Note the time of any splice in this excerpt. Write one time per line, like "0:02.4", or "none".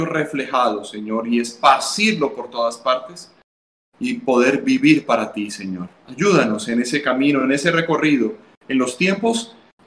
none

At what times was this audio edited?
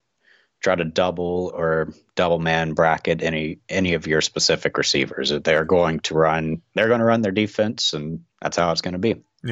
0:08.3

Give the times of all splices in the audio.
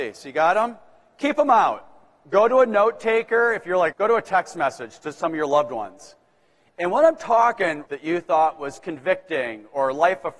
0:03.9
0:07.9

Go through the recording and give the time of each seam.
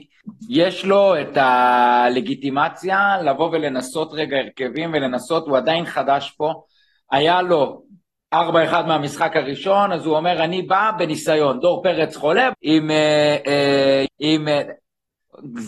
0:12.5
0:14.1

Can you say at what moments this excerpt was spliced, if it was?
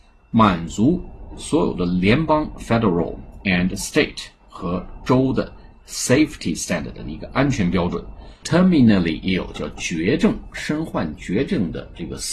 0:08.4

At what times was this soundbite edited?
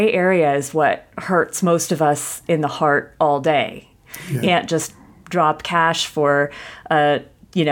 0:01.1
0:04.4

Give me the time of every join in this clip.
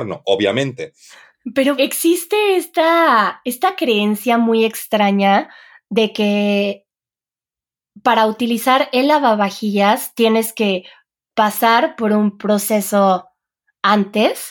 0:01.8

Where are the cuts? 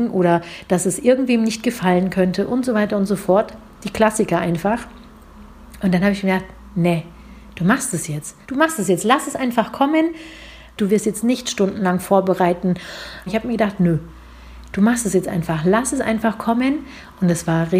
0:08.4
0:10.8
0:13.3

